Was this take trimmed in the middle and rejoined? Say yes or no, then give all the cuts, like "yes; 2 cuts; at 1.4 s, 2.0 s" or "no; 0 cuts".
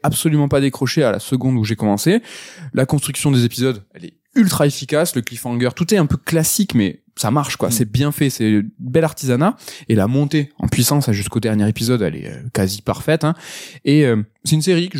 no; 0 cuts